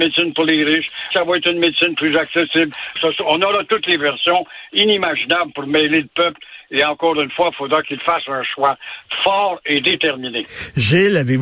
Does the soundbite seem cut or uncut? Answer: cut